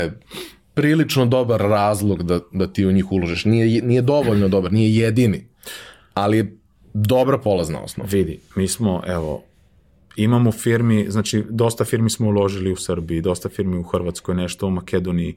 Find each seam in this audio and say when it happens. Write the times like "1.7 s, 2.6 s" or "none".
none